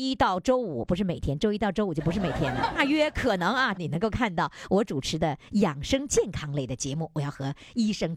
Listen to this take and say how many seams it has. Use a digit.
2